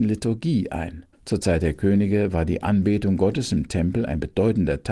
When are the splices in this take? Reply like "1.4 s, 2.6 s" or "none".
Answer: 1.1 s